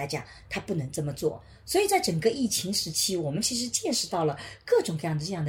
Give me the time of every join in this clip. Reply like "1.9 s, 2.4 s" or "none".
none